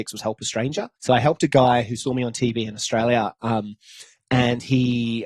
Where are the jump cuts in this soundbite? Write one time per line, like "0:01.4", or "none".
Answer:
0:01.0